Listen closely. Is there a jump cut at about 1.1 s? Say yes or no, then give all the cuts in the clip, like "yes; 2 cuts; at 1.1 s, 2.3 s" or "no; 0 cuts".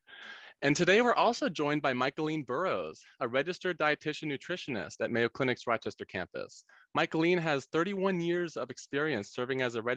no; 0 cuts